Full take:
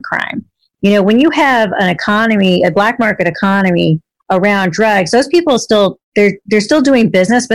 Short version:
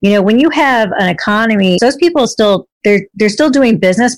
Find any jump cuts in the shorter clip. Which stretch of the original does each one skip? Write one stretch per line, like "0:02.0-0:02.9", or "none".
0:02.6-0:05.1

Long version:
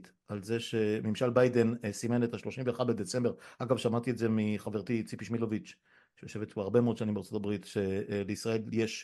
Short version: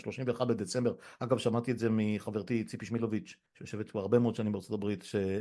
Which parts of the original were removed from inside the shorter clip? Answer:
0:05.9-0:06.1

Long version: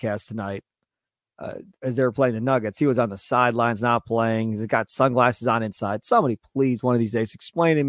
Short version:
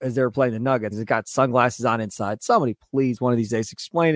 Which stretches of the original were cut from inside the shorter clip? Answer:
0:02.7-0:04.5

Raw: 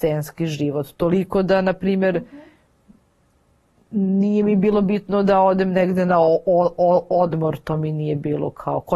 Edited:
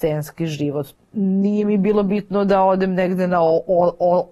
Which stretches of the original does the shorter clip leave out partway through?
0:01.0-0:03.7

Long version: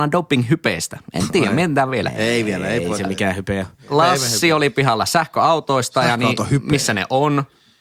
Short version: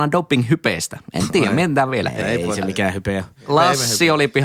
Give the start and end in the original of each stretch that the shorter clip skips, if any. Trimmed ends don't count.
0:02.2-0:02.6

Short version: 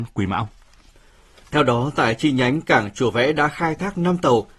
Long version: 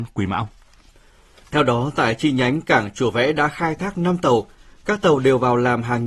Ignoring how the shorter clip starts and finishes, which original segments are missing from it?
none

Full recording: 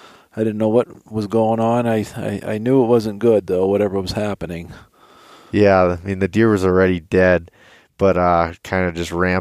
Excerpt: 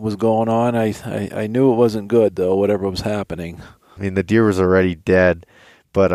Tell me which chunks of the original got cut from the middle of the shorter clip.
0:05.1-0:06.0

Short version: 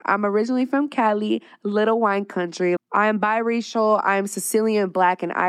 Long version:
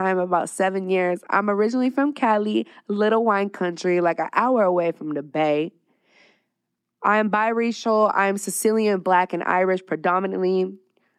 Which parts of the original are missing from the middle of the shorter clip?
0:04.0-0:06.9

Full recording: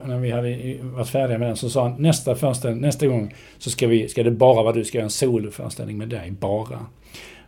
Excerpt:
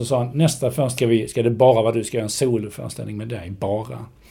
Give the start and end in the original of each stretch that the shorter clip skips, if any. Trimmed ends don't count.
0:02.6-0:03.8

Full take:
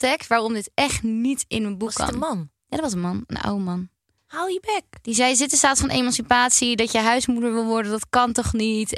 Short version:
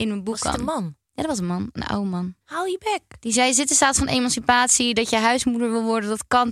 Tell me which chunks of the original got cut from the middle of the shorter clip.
0:03.9-0:04.2

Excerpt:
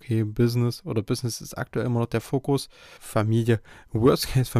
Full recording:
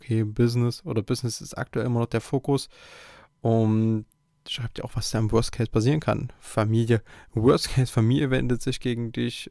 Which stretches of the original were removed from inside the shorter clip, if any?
0:03.0-0:06.4

